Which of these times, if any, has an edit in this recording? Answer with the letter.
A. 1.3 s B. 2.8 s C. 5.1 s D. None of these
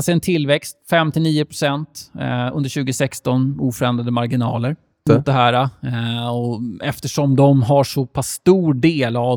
C